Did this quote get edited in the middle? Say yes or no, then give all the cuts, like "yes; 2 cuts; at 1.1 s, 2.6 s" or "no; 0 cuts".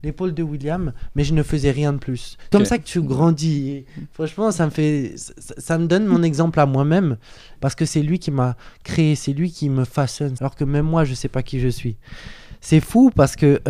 yes; 3 cuts; at 2.5 s, 7.6 s, 10.4 s